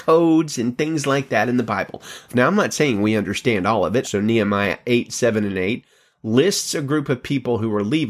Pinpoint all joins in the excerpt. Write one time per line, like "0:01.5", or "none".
0:02.3
0:04.0